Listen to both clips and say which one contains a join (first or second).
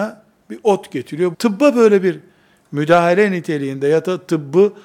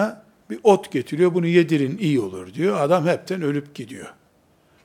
first